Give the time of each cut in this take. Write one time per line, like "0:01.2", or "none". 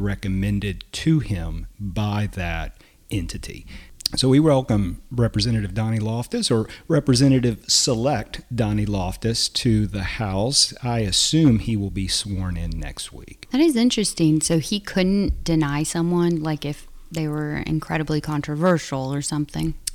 none